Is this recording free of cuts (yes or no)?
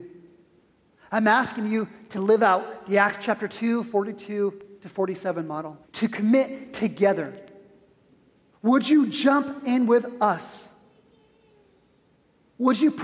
no